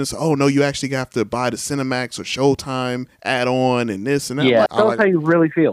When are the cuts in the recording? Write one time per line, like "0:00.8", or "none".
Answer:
0:04.7